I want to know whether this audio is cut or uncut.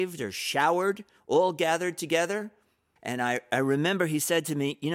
cut